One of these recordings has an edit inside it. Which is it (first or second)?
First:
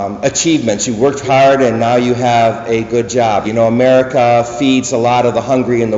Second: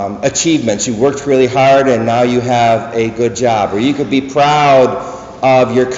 first